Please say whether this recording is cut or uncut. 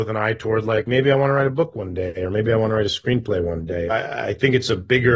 cut